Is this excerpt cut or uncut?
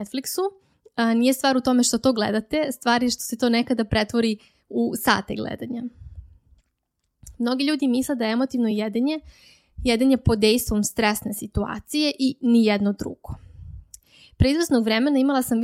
uncut